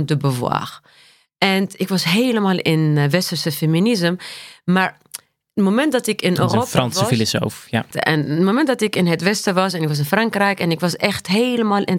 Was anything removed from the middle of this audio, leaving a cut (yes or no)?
yes